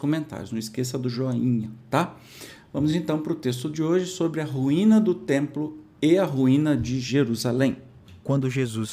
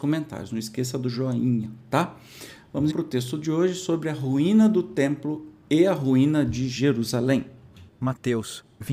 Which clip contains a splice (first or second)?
second